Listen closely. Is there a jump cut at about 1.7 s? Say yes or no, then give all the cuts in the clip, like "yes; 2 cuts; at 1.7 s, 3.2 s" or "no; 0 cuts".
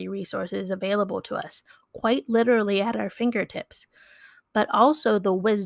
no; 0 cuts